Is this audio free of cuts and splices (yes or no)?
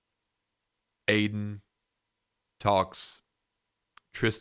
yes